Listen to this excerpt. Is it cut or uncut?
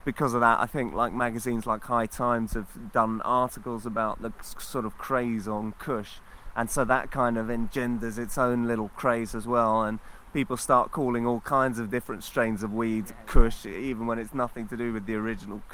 uncut